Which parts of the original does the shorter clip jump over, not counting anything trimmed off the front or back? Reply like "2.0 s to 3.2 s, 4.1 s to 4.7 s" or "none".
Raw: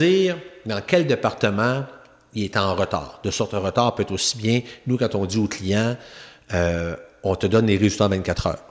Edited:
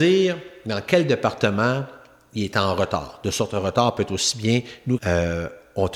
5.0 s to 6.5 s